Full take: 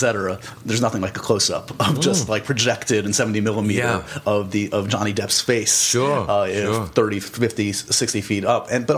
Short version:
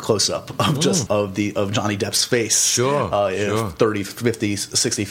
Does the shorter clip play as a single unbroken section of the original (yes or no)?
no